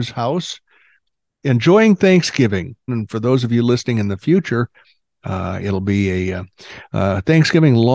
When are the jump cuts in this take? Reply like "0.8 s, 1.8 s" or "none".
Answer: 2.9 s